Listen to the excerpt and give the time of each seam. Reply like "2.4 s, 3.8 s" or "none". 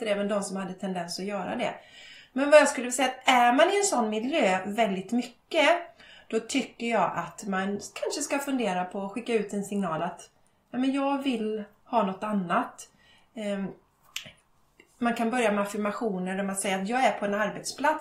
none